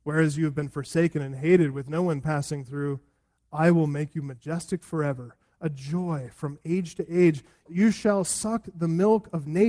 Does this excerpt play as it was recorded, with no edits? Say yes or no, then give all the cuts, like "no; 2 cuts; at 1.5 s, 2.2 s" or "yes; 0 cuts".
yes; 0 cuts